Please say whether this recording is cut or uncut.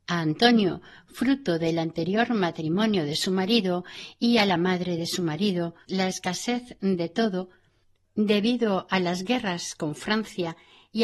cut